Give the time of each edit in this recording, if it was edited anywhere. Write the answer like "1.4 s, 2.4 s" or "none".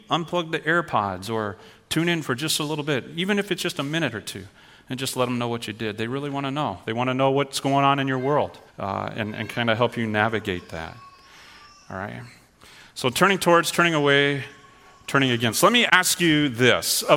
8.7 s